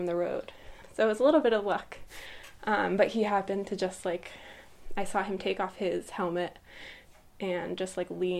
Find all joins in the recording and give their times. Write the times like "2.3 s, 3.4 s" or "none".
none